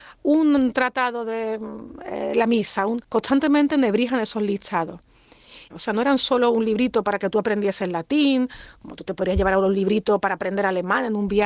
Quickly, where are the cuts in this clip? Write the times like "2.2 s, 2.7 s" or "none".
3.0 s, 5.7 s

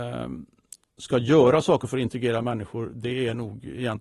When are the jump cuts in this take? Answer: none

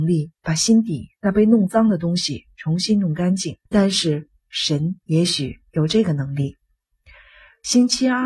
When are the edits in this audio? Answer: 3.7 s, 5.0 s

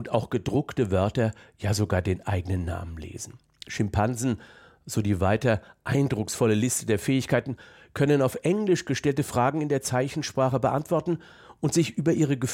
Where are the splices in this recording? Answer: none

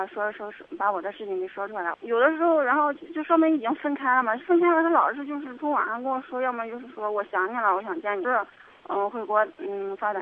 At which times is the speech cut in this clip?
1.9 s, 8.2 s

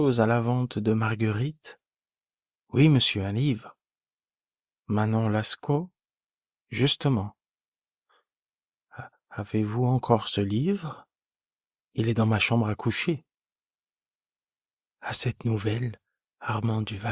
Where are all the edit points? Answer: none

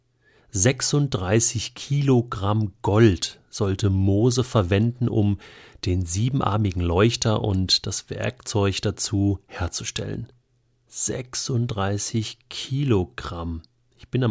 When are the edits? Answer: none

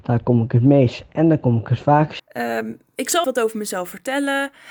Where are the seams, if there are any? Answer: 2.2 s, 3.2 s

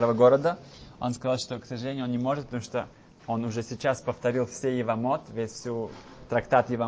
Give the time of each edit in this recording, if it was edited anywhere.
none

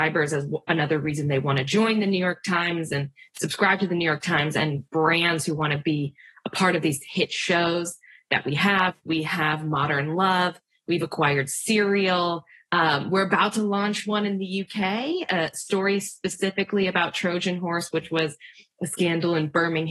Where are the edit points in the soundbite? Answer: 9.0 s

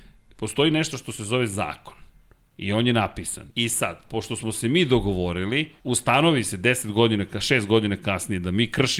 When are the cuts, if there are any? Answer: 3.5 s, 5.8 s

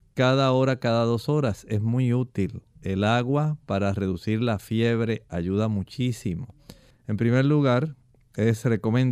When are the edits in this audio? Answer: 6.9 s

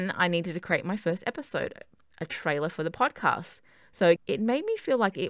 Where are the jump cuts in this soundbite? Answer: 4.2 s

